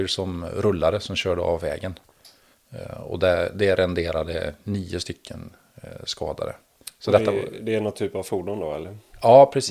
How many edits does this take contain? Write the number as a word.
zero